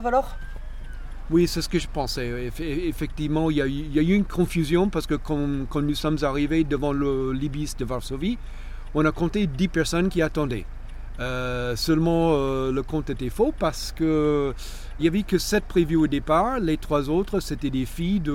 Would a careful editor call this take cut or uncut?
cut